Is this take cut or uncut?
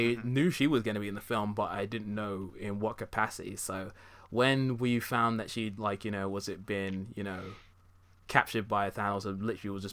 uncut